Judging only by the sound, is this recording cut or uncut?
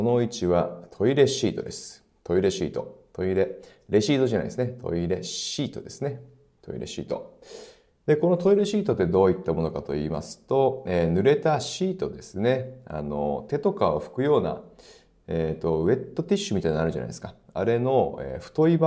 uncut